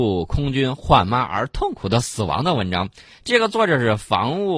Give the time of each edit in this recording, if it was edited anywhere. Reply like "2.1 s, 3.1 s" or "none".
none

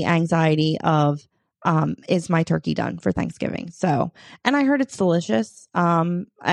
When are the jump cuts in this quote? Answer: none

